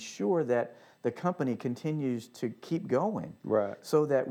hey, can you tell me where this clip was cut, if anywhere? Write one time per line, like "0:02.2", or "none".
none